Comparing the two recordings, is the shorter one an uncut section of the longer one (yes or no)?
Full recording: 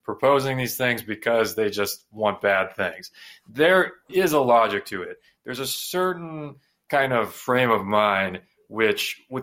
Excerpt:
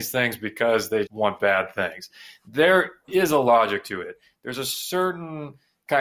no